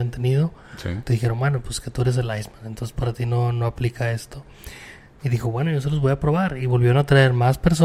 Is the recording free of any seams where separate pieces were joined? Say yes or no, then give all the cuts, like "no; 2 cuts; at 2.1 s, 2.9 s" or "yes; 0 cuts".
no; 1 cut; at 1.1 s